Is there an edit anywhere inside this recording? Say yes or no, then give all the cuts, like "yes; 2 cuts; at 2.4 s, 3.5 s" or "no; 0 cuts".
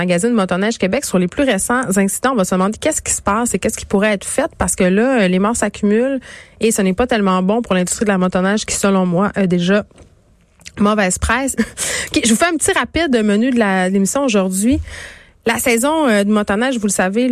yes; 1 cut; at 11.6 s